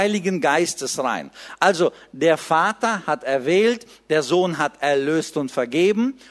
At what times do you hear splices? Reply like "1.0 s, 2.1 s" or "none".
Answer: none

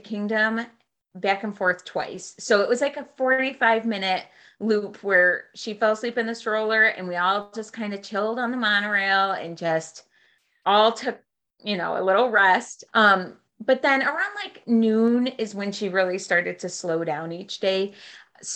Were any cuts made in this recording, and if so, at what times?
12.9 s

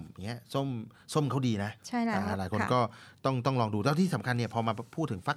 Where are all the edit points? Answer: 1.8 s

